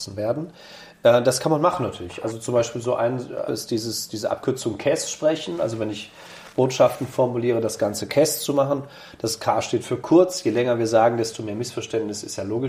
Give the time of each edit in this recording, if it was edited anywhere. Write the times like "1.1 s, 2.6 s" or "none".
3.5 s